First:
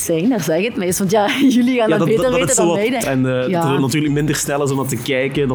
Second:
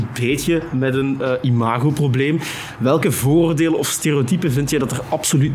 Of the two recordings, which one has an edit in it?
first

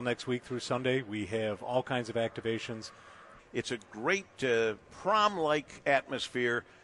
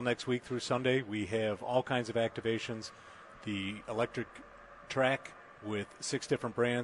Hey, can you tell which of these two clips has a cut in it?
first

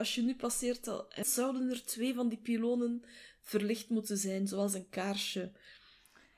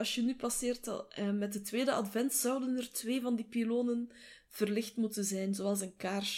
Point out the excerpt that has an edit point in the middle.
first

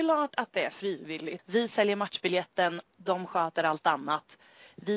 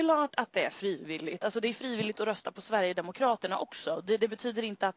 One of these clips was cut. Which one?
first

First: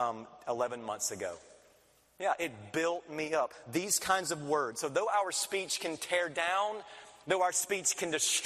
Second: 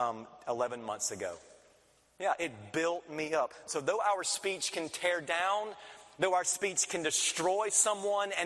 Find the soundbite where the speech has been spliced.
second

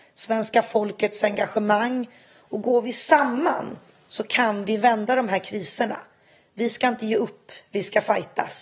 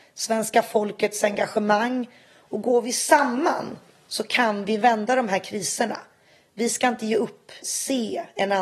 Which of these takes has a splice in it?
second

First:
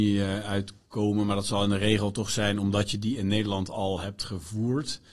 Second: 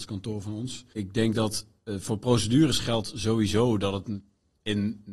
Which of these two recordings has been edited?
second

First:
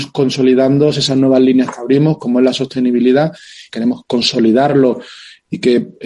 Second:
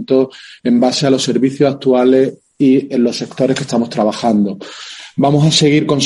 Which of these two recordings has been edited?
first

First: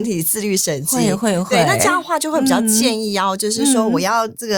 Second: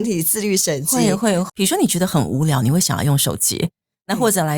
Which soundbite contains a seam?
second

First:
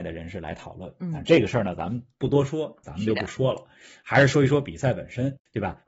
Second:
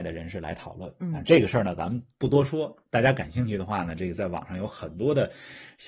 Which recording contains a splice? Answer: first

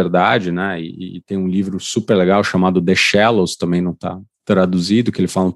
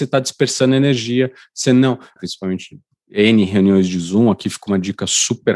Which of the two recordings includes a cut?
second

